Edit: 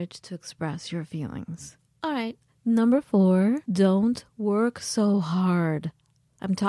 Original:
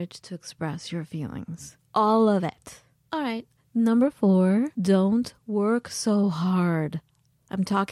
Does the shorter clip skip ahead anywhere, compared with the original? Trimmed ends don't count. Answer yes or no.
yes